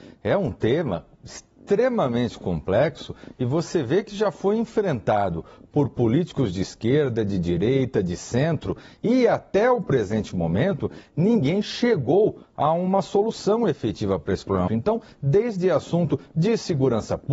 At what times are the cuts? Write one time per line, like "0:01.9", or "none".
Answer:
0:14.7